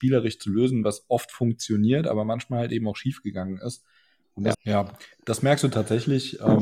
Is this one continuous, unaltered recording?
no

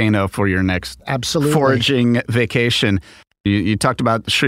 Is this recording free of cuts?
yes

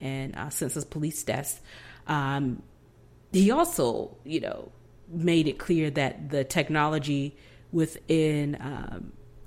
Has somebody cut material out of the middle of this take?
no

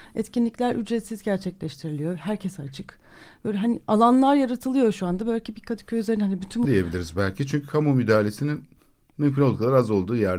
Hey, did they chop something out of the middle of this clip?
yes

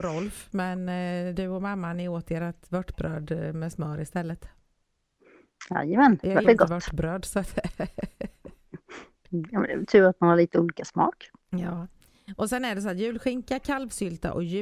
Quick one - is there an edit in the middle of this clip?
yes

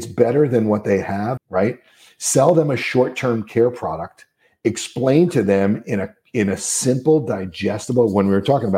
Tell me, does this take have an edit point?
yes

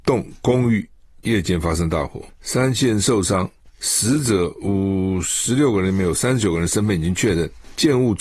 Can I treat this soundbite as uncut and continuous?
yes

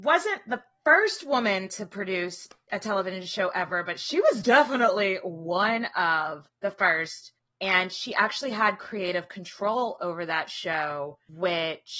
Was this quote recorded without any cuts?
yes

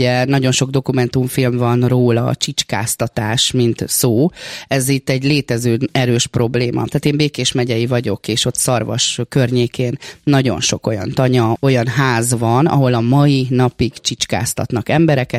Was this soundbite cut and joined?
yes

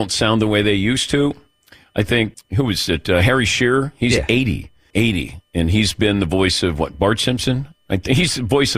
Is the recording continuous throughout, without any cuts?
no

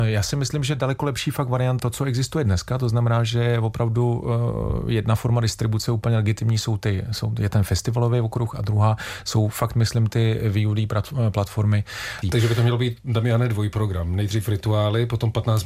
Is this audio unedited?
no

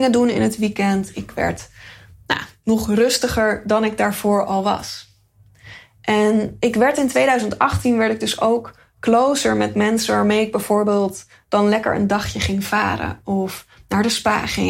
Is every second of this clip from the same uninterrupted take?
yes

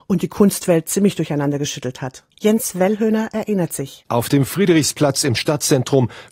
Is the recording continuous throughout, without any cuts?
no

